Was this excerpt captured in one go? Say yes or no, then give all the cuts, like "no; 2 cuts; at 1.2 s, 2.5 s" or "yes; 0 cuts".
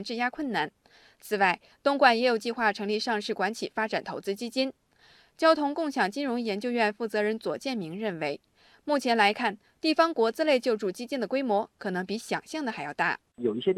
yes; 0 cuts